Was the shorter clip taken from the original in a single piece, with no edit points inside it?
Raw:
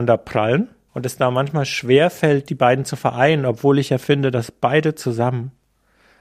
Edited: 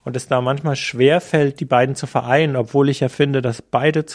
yes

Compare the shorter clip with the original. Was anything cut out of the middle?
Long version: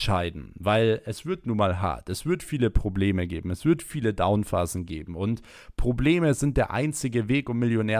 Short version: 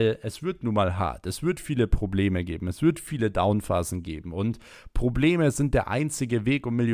no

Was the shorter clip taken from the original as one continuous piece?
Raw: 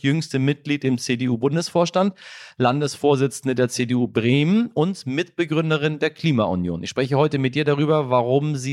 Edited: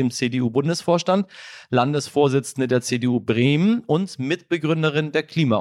yes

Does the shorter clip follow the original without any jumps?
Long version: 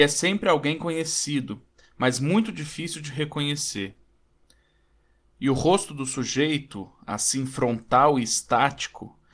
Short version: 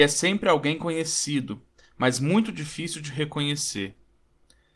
yes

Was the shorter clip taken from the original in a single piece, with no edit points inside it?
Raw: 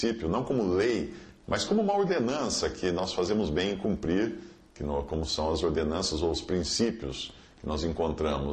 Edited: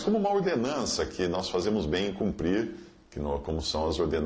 yes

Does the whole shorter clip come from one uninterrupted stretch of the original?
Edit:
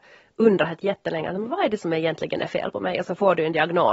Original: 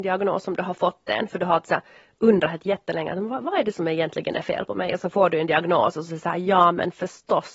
no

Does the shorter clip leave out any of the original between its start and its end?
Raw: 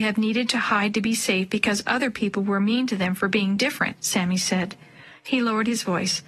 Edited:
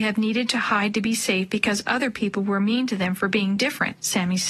no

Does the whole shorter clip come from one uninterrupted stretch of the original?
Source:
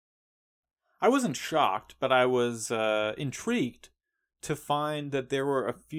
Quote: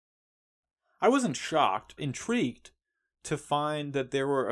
no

